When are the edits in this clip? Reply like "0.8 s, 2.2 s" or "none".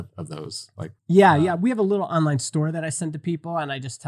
1.0 s